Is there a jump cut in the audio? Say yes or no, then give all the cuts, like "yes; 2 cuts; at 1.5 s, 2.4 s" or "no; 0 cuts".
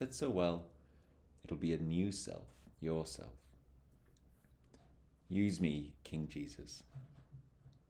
yes; 1 cut; at 2.7 s